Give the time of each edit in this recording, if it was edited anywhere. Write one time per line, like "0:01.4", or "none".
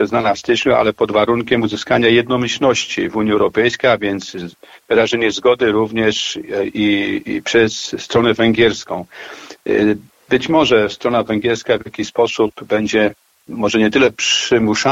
none